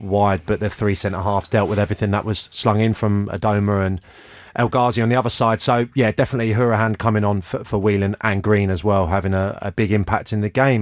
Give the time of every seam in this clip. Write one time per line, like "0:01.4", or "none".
none

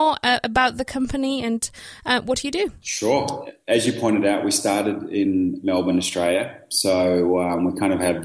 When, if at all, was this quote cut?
none

